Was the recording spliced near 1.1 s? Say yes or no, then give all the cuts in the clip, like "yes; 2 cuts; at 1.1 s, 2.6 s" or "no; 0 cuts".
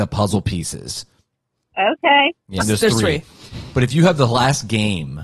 no; 1 cut; at 2.6 s